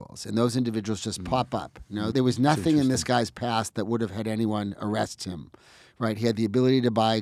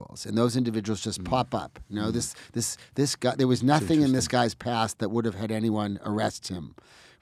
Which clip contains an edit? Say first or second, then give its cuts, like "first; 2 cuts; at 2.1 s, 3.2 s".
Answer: first; 1 cut; at 2.1 s